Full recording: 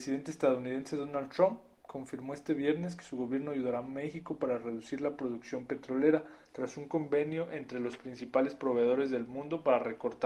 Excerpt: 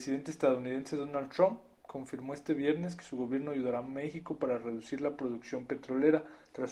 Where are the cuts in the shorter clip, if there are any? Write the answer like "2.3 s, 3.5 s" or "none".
none